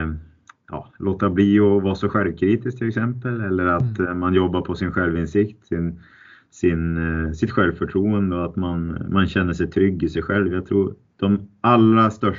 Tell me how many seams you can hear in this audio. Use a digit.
0